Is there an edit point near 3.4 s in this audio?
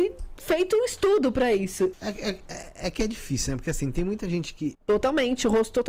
no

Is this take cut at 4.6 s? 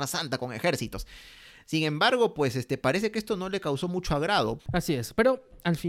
yes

